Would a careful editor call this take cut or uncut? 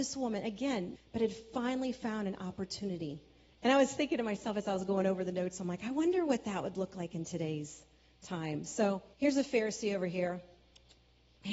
cut